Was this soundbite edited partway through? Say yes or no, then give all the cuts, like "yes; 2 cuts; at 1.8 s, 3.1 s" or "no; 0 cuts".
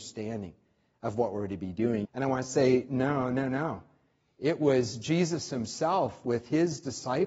yes; 1 cut; at 2.0 s